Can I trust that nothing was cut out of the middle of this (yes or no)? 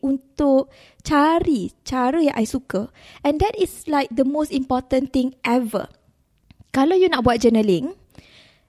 yes